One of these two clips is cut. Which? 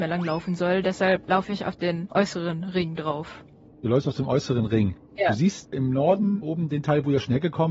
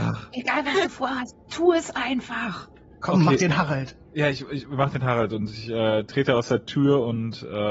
first; 1 cut; at 5.7 s

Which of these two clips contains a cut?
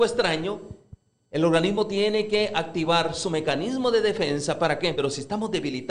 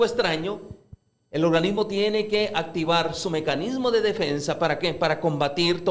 first; 1 cut; at 4.9 s

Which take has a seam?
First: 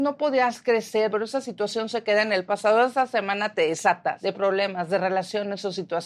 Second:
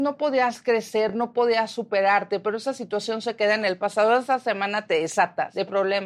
first; 1 cut; at 1.1 s

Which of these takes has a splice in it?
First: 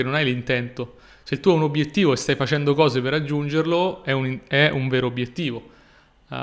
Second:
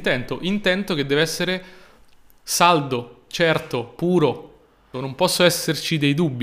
second; 1 cut; at 4.9 s

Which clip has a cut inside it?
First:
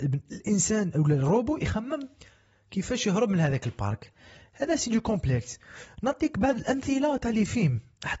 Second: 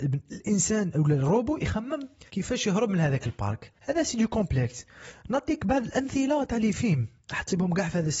second; 2 cuts; at 2.3 s, 3.8 s

